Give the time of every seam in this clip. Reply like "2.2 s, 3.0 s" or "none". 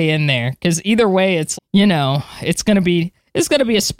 1.5 s